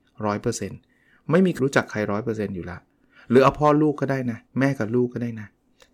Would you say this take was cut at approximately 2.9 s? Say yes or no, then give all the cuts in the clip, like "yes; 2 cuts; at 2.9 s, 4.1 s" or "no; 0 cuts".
no; 2 cuts; at 1.6 s, 4.5 s